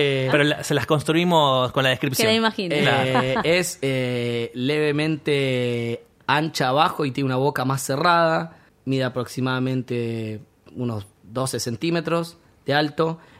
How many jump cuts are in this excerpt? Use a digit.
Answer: 0